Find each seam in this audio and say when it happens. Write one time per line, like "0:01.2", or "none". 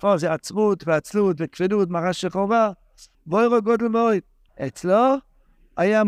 0:03.1
0:04.5

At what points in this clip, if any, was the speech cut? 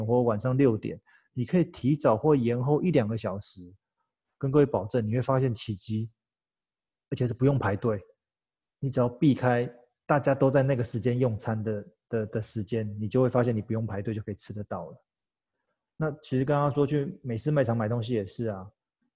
none

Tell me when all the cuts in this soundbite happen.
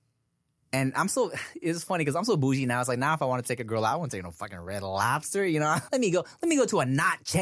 0:05.9

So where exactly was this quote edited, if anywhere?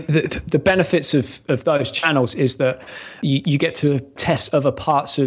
none

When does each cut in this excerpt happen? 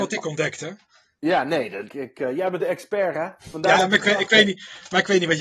0:01.9
0:03.4

